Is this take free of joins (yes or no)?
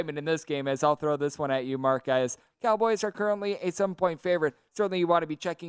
no